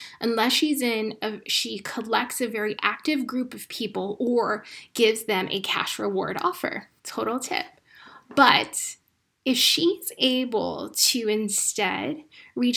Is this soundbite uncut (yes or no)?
no